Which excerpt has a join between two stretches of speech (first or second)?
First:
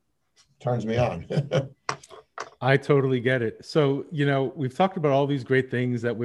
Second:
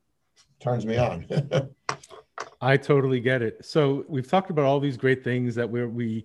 second